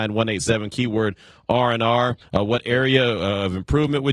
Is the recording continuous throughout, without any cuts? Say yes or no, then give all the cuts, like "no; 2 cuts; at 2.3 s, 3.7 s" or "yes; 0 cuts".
no; 1 cut; at 2.2 s